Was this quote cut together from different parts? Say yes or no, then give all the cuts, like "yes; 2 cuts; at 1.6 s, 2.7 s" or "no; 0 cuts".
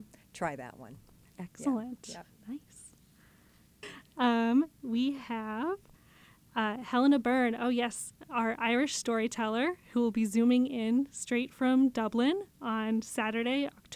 yes; 1 cut; at 3.8 s